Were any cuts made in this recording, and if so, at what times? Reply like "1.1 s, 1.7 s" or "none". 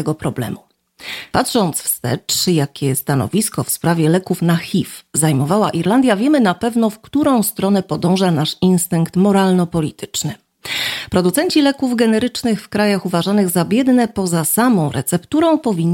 1.3 s